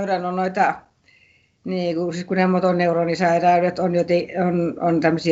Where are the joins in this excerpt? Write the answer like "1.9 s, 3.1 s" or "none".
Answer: none